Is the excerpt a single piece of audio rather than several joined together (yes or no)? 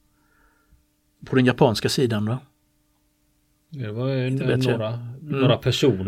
no